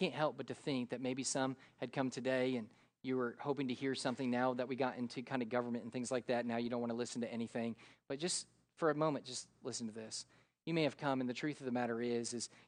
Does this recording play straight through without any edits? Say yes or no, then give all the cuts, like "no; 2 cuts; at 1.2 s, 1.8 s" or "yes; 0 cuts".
yes; 0 cuts